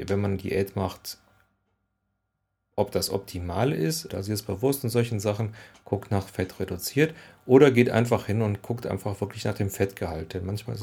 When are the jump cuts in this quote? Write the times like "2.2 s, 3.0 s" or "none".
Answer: 4.1 s